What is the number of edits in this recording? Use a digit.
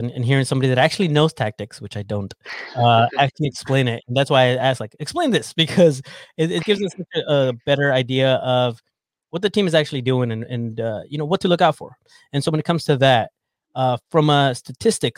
1